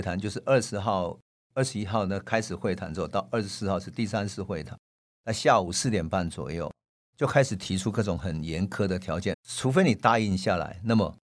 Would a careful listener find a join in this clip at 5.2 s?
no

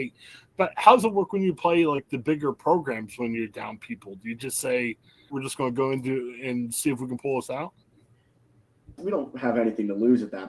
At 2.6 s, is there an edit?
no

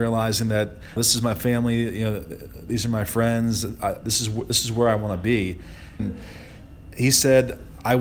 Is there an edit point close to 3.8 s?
no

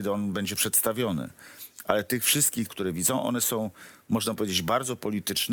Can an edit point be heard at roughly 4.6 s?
no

